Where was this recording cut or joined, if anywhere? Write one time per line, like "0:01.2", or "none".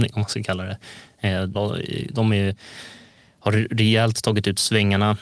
0:01.5

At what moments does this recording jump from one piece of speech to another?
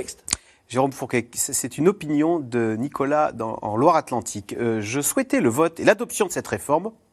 none

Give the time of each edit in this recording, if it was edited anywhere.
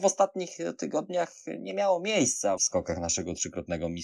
0:02.6

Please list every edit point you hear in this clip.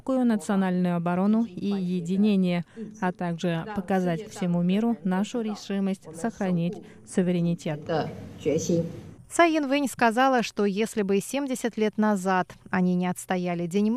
0:09.2

